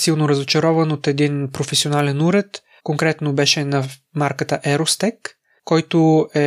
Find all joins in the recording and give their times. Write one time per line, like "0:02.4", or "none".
0:02.8